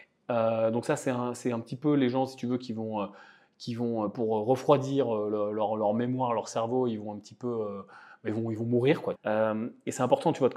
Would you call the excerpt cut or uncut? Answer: cut